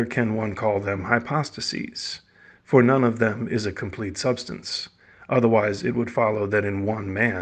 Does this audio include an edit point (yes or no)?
no